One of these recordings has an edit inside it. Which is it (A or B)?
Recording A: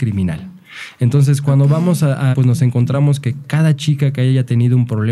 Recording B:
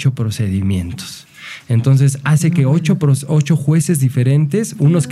A